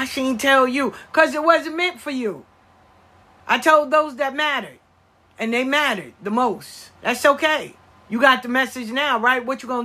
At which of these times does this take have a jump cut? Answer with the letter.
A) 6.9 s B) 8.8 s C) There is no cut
A